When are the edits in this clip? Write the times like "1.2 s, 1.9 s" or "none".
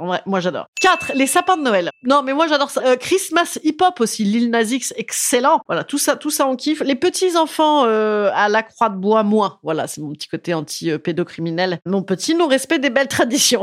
2.8 s